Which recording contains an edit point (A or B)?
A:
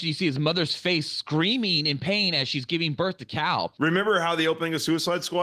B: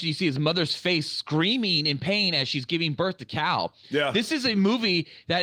A